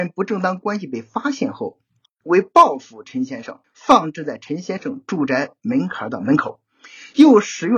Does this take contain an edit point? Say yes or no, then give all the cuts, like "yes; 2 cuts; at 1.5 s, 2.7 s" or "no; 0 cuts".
yes; 2 cuts; at 2.2 s, 3.6 s